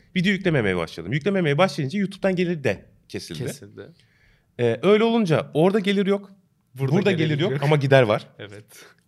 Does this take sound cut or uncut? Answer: uncut